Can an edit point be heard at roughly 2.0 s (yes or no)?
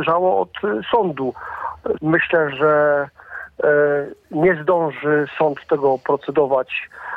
yes